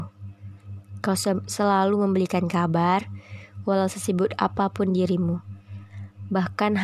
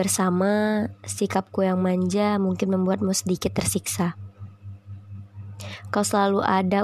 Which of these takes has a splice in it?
first; 1 cut; at 1.0 s

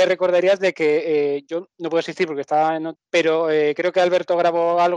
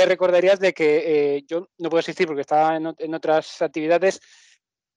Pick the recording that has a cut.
first; 1 cut; at 3.0 s

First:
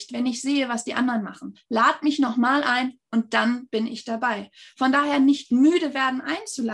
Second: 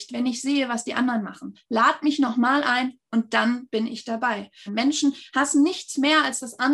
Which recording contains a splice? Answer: second; 1 cut; at 4.7 s

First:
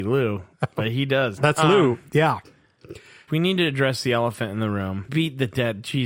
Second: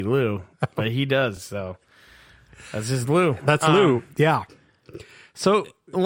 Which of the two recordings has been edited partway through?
first; 3 cuts; at 1.4 s, 3.3 s, 5.1 s

